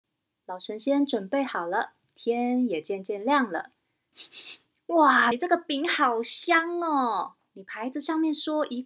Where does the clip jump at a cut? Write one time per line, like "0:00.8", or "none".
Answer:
0:04.1
0:05.3